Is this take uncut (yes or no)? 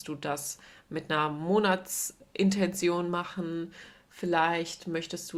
yes